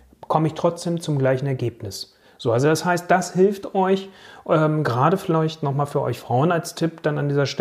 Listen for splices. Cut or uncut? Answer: uncut